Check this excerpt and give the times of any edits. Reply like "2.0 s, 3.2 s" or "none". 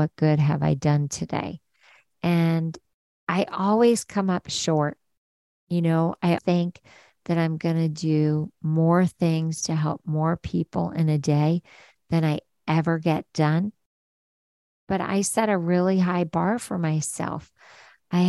6.4 s

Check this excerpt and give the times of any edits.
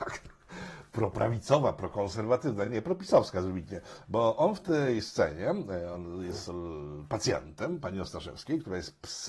none

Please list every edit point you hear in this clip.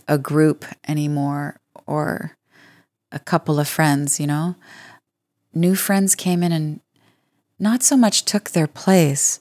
none

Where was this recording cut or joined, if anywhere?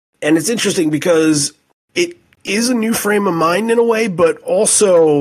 none

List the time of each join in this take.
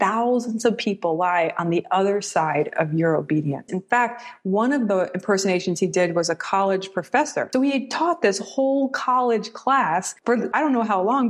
3.7 s

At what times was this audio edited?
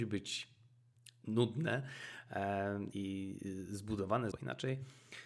2.9 s, 4.3 s

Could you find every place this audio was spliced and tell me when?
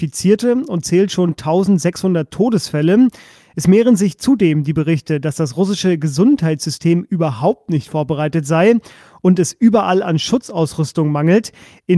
none

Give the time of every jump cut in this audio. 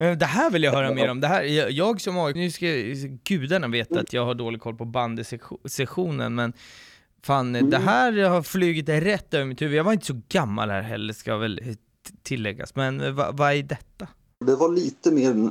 2.4 s, 14.4 s

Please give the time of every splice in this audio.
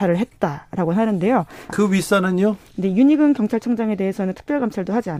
1.7 s

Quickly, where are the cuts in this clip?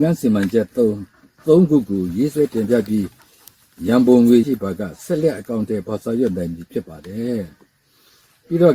4.4 s

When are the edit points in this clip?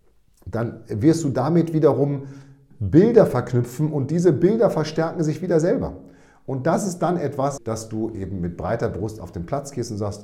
2.7 s, 7.6 s

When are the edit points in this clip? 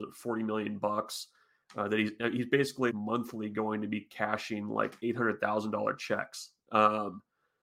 2.9 s

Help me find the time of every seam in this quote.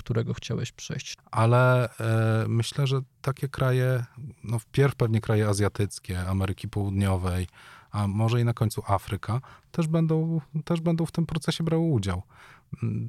1.2 s

